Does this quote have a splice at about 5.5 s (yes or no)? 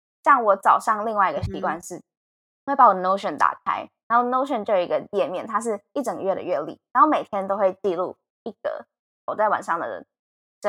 no